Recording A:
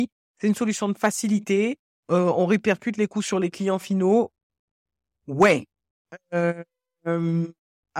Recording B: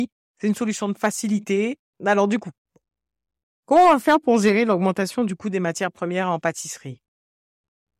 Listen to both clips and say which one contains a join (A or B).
B